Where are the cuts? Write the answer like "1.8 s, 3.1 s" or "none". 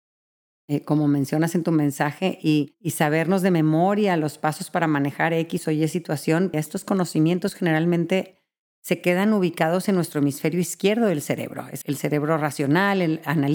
6.5 s, 11.8 s

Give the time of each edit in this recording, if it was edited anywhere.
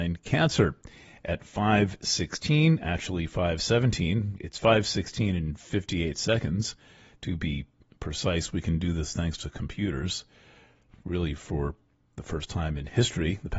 none

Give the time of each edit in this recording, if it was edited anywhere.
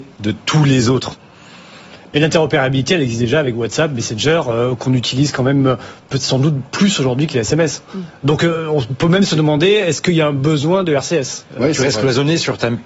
none

